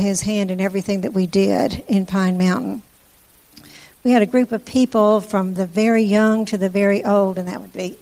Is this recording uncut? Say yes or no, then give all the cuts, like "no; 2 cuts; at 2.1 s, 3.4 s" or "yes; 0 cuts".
yes; 0 cuts